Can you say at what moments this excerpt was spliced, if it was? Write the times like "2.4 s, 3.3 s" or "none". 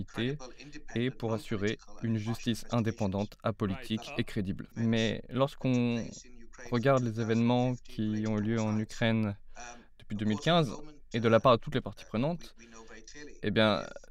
4.7 s